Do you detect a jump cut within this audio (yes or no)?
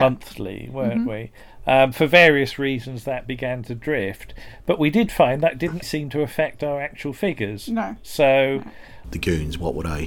yes